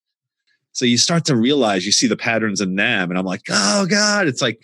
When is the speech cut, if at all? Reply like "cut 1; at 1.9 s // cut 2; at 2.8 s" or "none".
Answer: none